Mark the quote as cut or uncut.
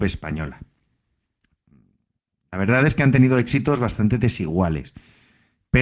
uncut